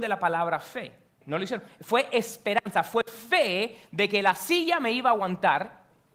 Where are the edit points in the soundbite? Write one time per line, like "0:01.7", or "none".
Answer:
0:01.2